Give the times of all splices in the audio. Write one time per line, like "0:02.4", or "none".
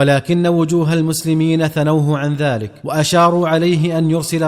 0:02.8